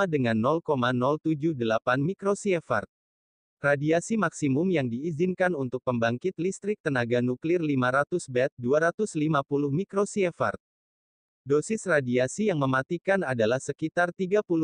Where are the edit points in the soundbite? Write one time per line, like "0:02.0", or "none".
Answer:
0:11.3

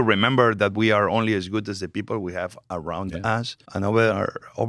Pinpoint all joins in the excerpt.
0:03.6

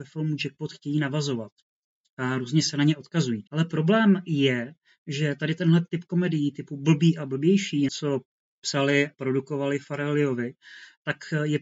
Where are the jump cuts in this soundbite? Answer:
0:03.5
0:07.9

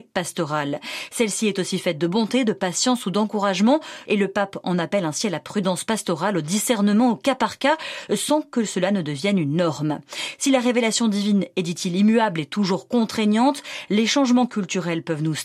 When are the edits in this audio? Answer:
0:04.1

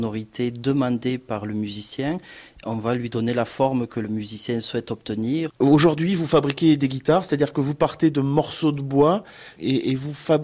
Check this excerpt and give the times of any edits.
0:05.5

